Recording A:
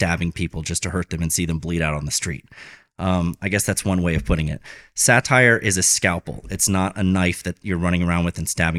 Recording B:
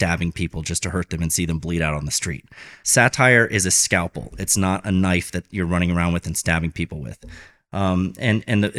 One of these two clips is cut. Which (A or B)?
B